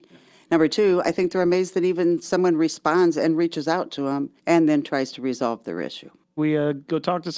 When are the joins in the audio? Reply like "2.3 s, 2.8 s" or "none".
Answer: 4.4 s, 6.4 s